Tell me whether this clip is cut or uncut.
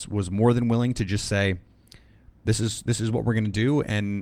uncut